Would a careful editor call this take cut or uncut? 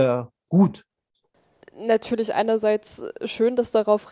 uncut